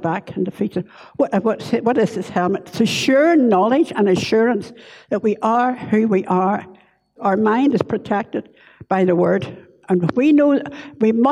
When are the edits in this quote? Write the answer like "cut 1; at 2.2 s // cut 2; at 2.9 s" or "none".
cut 1; at 7.2 s